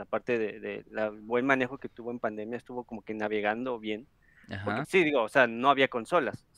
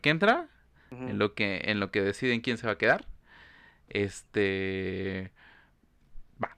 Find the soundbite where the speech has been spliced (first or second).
first